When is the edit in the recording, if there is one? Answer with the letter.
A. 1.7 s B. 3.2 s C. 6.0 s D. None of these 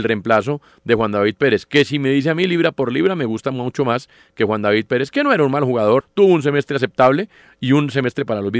C